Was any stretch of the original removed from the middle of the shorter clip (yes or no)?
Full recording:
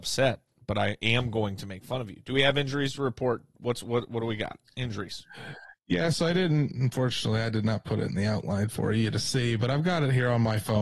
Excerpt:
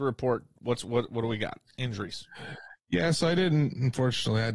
no